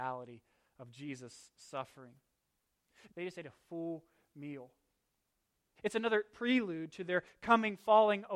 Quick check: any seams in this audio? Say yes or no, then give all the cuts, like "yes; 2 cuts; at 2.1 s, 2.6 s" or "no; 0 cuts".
yes; 2 cuts; at 3.1 s, 5.8 s